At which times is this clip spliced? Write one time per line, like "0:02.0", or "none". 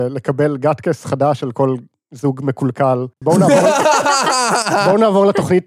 0:03.2